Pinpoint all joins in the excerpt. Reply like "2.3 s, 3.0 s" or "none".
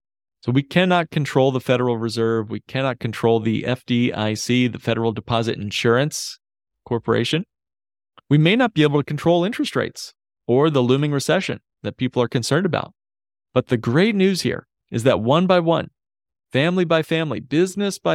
none